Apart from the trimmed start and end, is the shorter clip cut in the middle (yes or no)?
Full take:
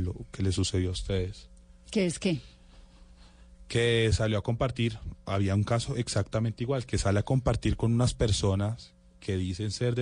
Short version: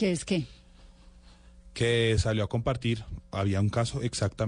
no